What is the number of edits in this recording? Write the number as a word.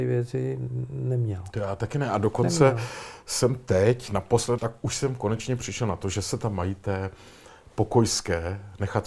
one